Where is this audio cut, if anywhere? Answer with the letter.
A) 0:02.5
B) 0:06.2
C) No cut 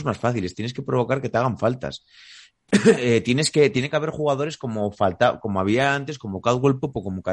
C